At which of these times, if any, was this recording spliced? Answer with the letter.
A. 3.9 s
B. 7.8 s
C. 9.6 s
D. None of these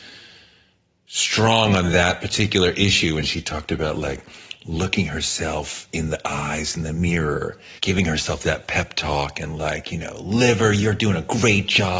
B